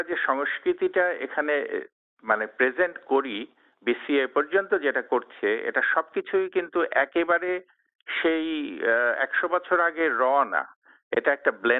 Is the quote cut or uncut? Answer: uncut